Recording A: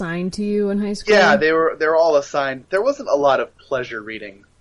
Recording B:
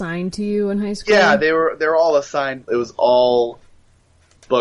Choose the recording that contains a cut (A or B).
B